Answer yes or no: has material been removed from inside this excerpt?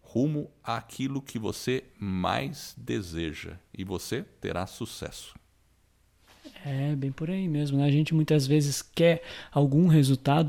no